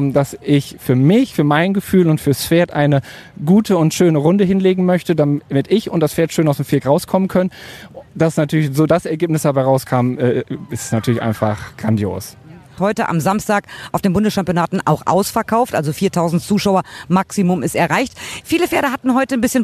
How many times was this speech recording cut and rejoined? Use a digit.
2